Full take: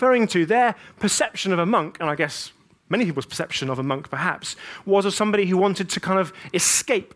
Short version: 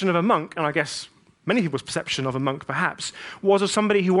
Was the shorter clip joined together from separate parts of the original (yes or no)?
no